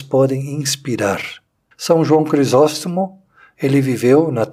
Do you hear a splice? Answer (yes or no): yes